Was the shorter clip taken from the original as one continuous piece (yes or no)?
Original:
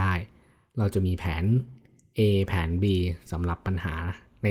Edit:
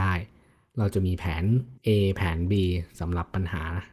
no